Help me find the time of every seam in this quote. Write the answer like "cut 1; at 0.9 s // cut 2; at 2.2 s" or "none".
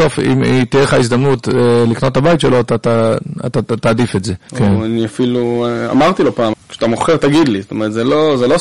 cut 1; at 4.5 s // cut 2; at 6.5 s